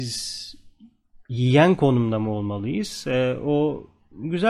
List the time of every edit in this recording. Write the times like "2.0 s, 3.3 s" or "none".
none